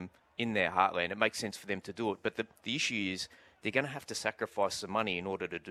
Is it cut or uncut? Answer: uncut